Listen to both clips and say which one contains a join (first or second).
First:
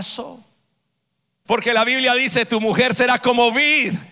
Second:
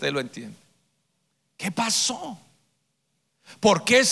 first